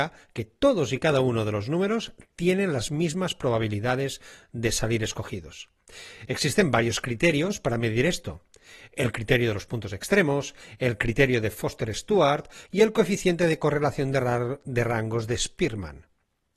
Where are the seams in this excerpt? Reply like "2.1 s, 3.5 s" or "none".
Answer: none